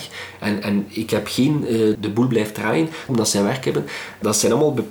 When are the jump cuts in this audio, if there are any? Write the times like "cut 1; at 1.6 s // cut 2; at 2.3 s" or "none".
cut 1; at 1.9 s // cut 2; at 3.1 s